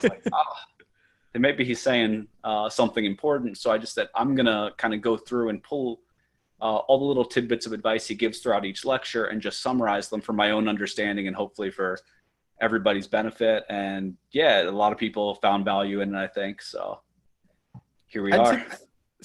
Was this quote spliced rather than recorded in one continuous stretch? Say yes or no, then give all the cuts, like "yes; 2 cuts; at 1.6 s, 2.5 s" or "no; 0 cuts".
no; 0 cuts